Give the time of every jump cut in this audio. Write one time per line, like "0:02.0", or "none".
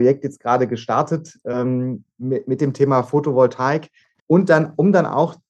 0:04.2